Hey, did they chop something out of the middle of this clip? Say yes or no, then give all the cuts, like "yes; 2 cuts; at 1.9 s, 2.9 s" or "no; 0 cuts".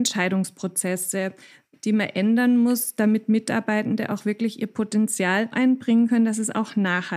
yes; 2 cuts; at 1.7 s, 5.5 s